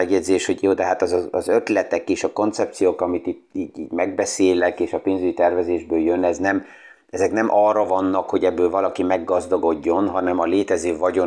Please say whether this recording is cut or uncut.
cut